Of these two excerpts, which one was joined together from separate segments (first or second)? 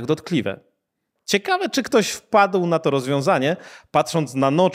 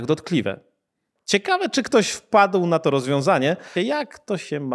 second